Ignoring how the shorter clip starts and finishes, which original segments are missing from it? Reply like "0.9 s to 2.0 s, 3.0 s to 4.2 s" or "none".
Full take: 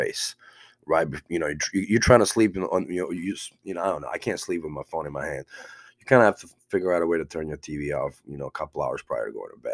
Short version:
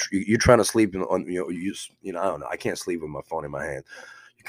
none